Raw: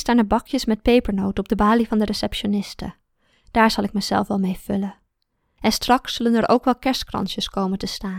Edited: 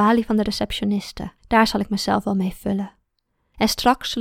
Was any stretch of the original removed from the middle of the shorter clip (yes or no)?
yes